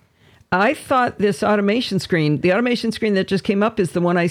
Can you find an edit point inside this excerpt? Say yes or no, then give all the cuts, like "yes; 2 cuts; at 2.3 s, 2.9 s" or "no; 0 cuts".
no; 0 cuts